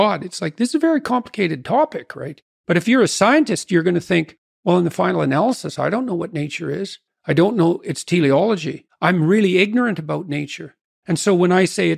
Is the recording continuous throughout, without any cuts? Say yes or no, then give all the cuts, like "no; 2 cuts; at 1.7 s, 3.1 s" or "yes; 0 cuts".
no; 2 cuts; at 2.5 s, 7.1 s